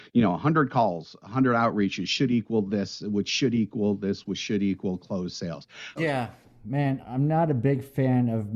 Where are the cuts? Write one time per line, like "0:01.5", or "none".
0:06.0
0:07.0